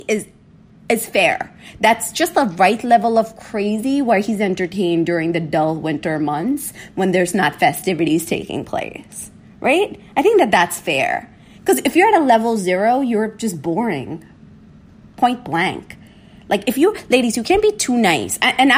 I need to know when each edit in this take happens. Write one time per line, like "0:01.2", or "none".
none

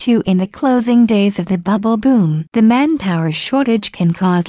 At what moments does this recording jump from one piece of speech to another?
0:02.5

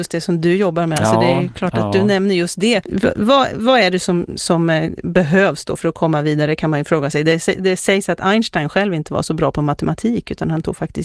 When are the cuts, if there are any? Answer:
0:02.8

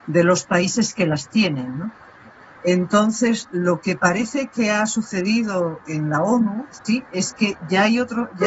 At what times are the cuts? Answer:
none

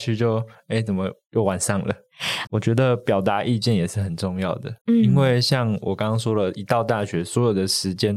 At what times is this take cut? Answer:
0:02.5
0:04.8

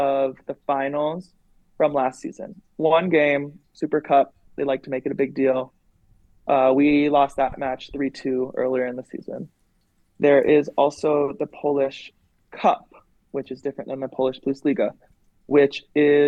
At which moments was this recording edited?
none

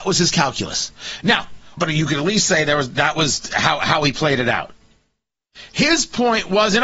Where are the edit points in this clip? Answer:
0:01.8

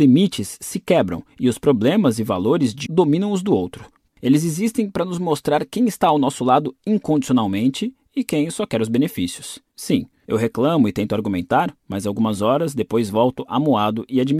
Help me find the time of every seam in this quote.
0:02.9
0:04.1
0:09.7

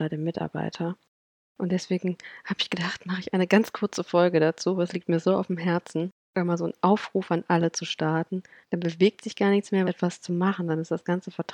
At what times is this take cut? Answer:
0:08.6
0:09.8

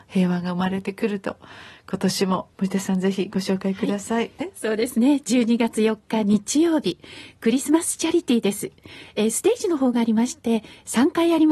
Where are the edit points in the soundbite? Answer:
0:02.5
0:04.4

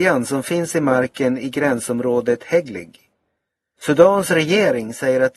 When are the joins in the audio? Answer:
0:03.8

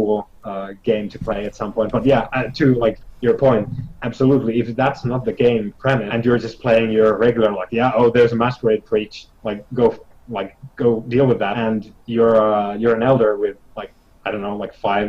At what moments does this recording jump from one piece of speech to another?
none

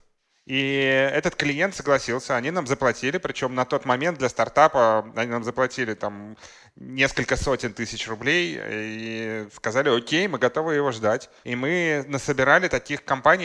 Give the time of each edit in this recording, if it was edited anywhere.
0:11.4

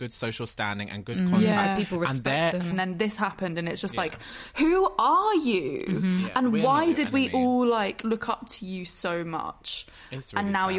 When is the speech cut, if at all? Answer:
0:02.7

